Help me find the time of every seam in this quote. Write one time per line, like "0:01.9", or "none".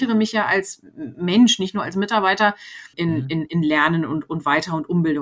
0:02.9